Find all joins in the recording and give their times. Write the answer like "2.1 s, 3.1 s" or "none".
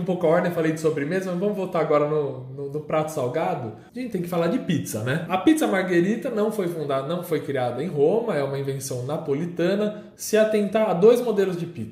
5.3 s, 10.1 s